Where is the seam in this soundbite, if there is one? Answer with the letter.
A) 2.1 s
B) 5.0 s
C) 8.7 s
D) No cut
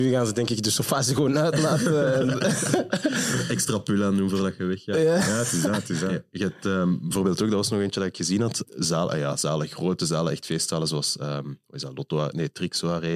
C